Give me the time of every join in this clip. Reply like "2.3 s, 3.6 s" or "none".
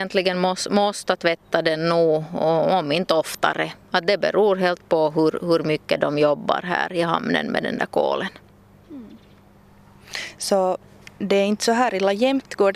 none